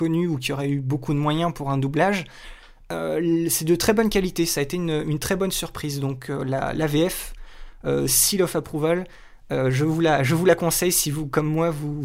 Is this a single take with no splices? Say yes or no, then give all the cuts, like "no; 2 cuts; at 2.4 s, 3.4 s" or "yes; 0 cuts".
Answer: yes; 0 cuts